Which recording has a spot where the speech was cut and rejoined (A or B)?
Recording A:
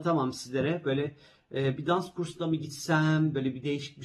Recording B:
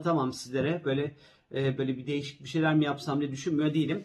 B